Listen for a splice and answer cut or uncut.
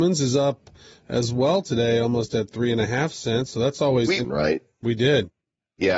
cut